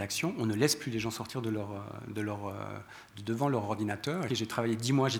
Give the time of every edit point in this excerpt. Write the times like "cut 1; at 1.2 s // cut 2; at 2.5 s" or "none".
cut 1; at 4.3 s